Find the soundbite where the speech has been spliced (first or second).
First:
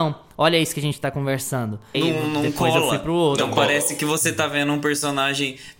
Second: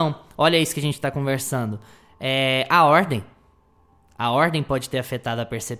first